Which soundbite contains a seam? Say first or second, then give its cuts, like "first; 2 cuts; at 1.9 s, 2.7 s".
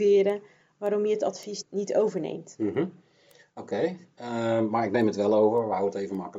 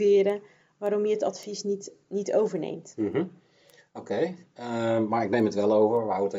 first; 1 cut; at 1.6 s